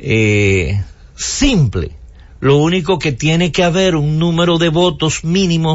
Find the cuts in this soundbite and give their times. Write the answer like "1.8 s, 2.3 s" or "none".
none